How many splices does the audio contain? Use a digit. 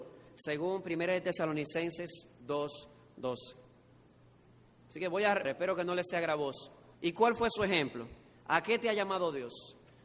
3